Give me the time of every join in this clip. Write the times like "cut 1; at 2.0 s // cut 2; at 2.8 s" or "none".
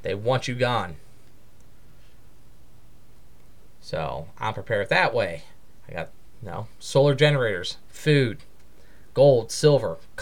none